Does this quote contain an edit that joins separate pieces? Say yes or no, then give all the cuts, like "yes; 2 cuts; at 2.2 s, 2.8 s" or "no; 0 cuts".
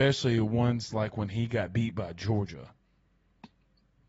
no; 0 cuts